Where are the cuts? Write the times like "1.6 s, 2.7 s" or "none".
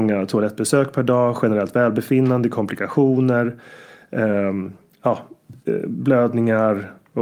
none